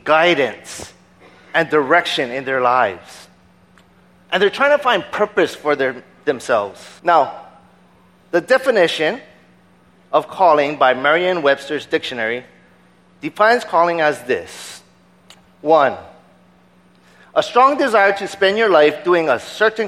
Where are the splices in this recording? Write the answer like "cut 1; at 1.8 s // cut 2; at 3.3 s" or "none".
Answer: cut 1; at 7.0 s